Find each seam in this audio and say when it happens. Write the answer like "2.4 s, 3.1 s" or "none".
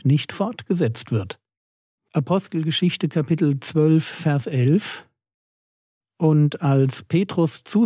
2.0 s